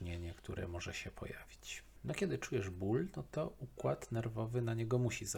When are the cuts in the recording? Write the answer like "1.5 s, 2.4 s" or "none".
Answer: none